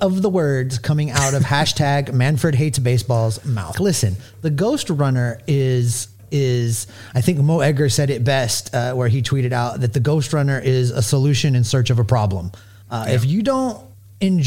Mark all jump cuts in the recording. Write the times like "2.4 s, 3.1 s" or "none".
3.7 s